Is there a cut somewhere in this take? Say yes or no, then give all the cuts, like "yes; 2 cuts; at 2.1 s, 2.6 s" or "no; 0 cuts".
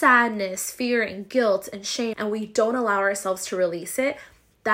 yes; 1 cut; at 2.1 s